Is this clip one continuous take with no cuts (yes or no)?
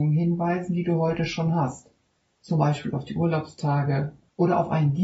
yes